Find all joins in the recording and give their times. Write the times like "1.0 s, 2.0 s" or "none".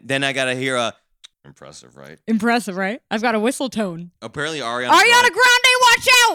1.3 s